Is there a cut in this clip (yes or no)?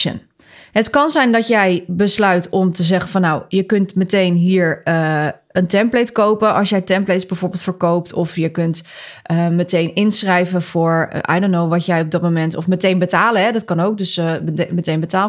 no